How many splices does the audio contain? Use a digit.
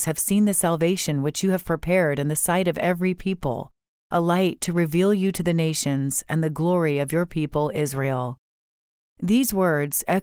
0